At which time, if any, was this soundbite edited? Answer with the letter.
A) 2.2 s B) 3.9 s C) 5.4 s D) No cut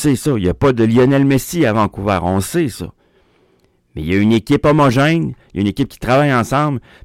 D